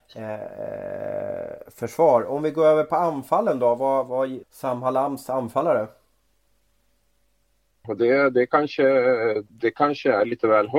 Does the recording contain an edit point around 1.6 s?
no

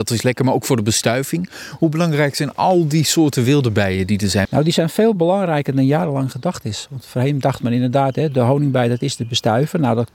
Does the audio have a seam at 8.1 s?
no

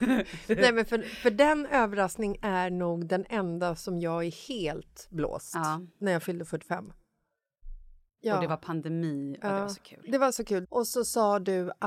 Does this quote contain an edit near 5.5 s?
no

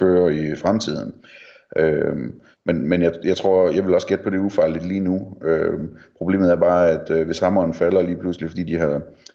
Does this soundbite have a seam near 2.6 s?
no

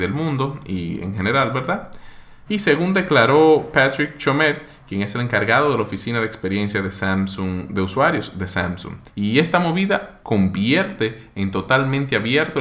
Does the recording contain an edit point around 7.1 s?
no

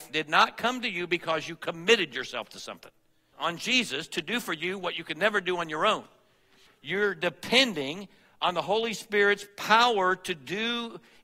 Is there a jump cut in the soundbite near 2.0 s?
no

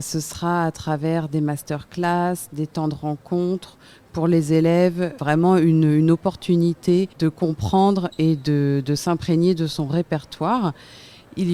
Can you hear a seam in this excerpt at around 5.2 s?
yes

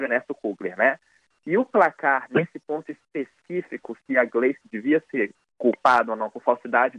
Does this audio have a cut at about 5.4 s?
no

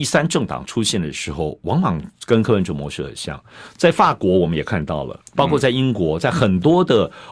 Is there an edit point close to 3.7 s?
no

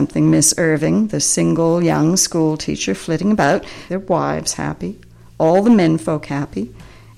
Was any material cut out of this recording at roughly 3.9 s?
yes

